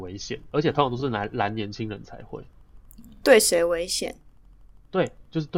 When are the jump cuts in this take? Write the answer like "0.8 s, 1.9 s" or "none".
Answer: none